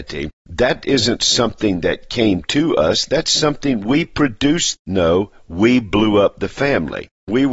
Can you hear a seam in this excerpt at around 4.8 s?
yes; 1 cut; at 4.8 s

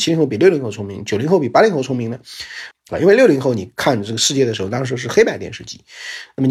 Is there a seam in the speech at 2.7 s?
yes; 1 cut; at 2.7 s

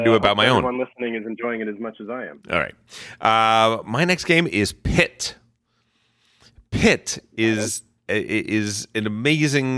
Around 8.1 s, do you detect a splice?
yes; 1 cut; at 8.1 s

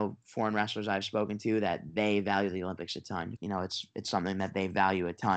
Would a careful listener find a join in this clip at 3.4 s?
yes; 1 cut; at 3.4 s

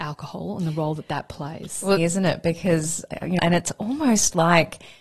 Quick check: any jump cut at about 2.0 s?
yes; 2 cuts; at 2.0 s, 3.4 s

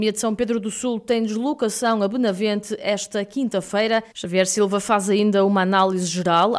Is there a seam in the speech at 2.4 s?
no; 1 cut; at 4.1 s

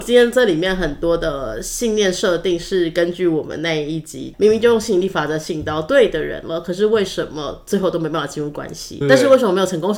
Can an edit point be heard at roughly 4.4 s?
no; 1 cut; at 9.0 s

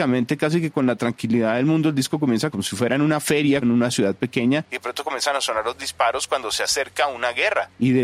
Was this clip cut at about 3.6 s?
yes; 2 cuts; at 2.5 s, 3.6 s

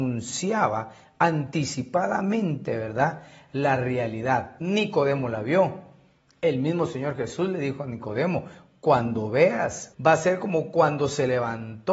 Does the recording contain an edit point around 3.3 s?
no; 2 cuts; at 4.6 s, 9.9 s

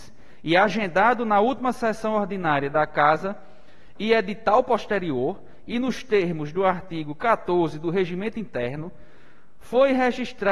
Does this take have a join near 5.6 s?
no; 0 cuts

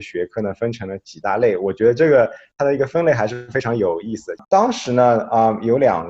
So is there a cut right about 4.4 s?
yes; 1 cut; at 4.4 s

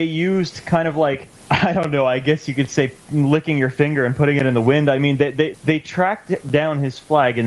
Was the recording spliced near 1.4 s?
yes; 2 cuts; at 1.4 s, 5.5 s

